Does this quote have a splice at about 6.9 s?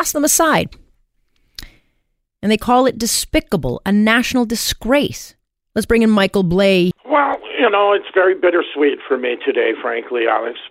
yes; 2 cuts; at 5.7 s, 6.9 s

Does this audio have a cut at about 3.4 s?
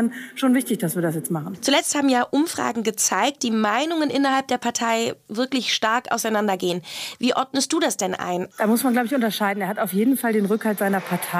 yes; 2 cuts; at 3.4 s, 8.5 s

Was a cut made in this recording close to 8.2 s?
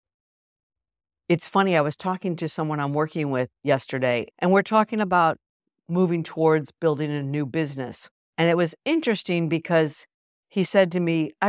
yes; 1 cut; at 8.2 s

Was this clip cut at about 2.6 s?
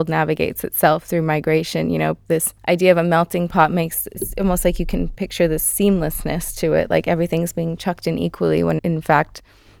yes; 2 cuts; at 2.6 s, 8.8 s

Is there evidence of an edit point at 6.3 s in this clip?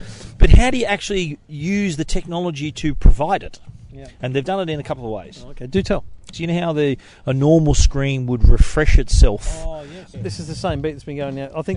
yes; 2 cuts; at 6.3 s, 10.1 s

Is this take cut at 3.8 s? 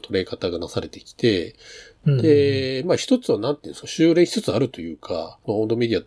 yes; 1 cut; at 3.8 s

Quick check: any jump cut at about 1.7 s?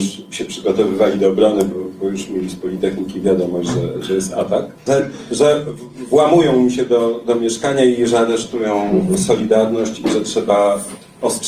no; 1 cut; at 4.9 s

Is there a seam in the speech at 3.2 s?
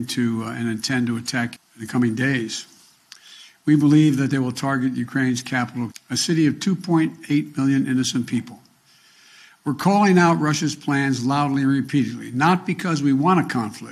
no; 2 cuts; at 1.6 s, 5.9 s

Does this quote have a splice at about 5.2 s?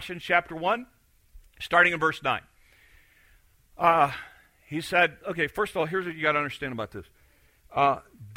yes; 1 cut; at 5.2 s

